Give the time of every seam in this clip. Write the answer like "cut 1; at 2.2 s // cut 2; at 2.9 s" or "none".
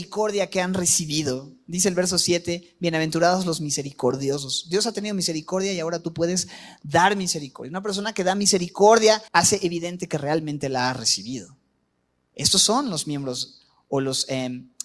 cut 1; at 9.3 s